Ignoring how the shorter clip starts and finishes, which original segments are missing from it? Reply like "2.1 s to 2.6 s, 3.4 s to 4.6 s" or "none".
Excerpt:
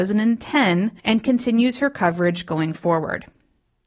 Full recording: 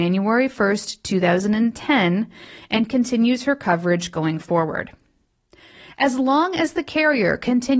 2.3 s to 2.6 s